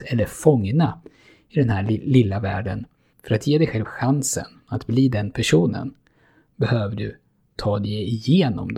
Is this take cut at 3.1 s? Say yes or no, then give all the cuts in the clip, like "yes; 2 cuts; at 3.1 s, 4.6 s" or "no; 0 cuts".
yes; 1 cut; at 3.1 s